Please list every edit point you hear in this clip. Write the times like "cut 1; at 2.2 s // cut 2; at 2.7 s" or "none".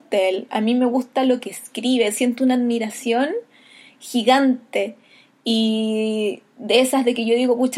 none